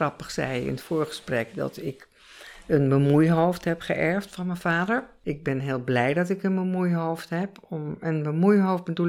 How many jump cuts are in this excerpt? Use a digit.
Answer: 0